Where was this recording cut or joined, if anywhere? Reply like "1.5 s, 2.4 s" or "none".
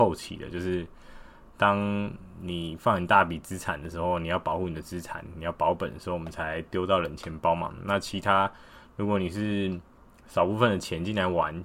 none